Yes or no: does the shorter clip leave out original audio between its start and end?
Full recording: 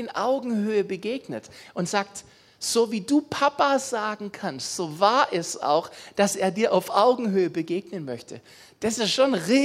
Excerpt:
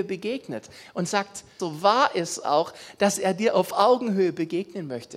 yes